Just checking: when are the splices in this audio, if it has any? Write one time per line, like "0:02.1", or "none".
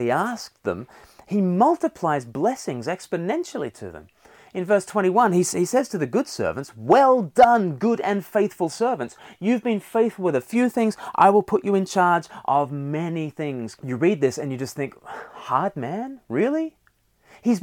0:13.8